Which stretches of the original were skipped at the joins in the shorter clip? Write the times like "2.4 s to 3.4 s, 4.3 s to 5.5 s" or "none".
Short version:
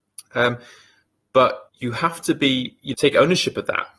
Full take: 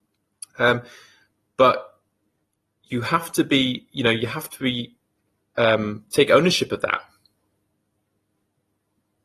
1.9 s to 2.8 s, 4.0 s to 6.1 s